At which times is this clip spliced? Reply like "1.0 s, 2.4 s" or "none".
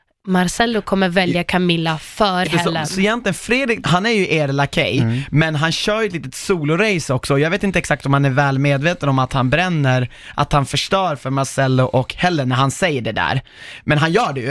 2.4 s, 3.8 s

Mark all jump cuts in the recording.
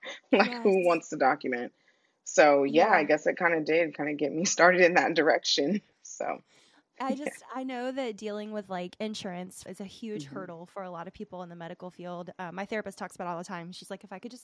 9.7 s

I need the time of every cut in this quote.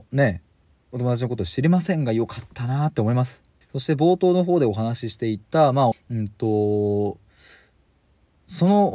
3.6 s, 5.9 s

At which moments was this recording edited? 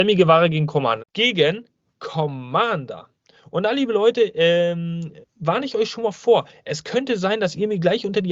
1.0 s, 5.2 s

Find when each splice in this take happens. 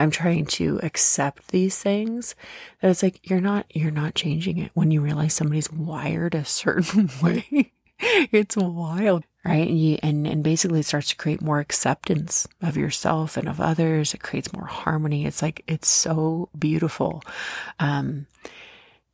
9.2 s

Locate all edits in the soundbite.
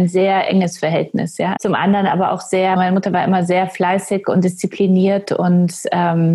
1.6 s, 2.8 s

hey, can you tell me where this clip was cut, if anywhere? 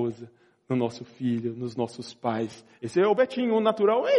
2.8 s

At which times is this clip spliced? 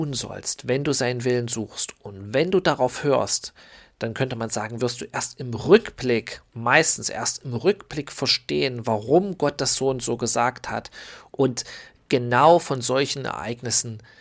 11.3 s

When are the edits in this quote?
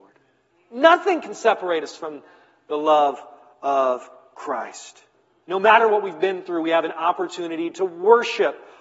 5.4 s

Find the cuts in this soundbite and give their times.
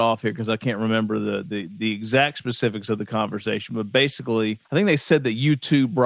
4.7 s

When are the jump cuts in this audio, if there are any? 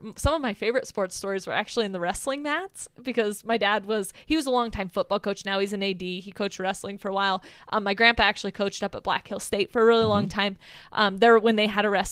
none

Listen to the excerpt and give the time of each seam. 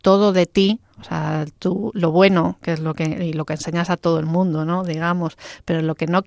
none

